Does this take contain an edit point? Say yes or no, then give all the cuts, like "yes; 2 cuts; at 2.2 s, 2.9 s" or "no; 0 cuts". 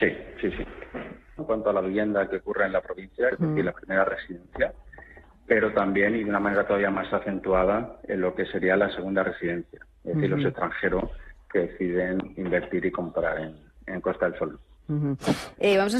yes; 2 cuts; at 1.4 s, 3.3 s